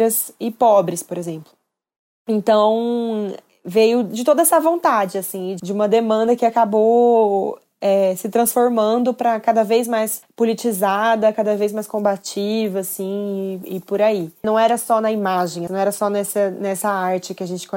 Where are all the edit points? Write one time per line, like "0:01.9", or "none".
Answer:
0:14.4
0:15.7